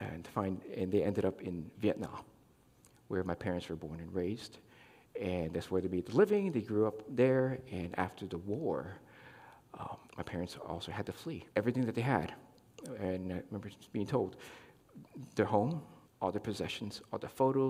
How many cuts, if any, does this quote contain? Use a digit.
3